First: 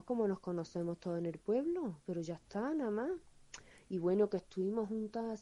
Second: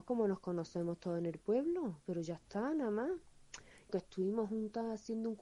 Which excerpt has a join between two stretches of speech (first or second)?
second